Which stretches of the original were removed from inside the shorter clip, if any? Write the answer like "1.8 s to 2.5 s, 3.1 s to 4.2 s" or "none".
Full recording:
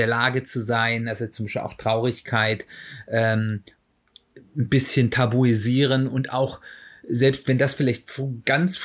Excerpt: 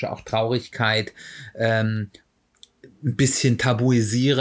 none